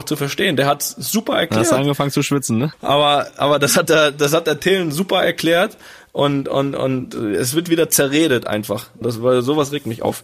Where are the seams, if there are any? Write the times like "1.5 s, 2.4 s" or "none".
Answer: 2.7 s, 9.0 s